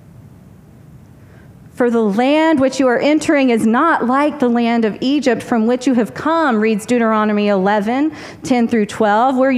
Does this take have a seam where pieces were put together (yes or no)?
no